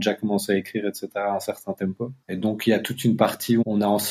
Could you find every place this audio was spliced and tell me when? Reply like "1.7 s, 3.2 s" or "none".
2.2 s